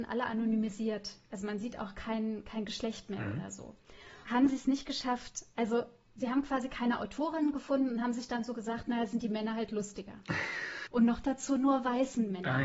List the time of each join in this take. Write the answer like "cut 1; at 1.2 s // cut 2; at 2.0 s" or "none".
cut 1; at 4.2 s // cut 2; at 10.9 s